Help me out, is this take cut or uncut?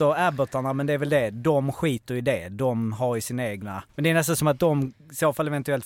cut